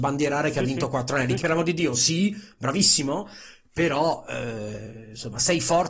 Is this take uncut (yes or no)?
no